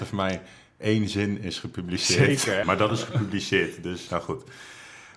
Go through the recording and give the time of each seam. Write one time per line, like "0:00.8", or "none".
0:02.6
0:04.1